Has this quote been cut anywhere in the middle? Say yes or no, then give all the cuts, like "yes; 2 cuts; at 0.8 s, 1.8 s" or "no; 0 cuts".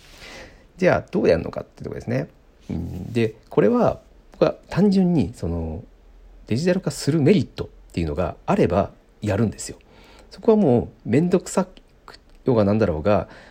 no; 0 cuts